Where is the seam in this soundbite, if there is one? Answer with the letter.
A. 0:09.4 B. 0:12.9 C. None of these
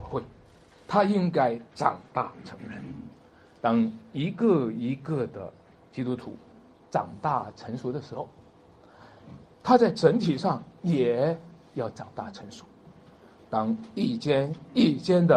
A